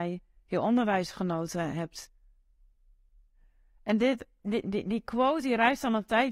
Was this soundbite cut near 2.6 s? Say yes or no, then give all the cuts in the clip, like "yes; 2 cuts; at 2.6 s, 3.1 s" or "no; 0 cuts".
no; 0 cuts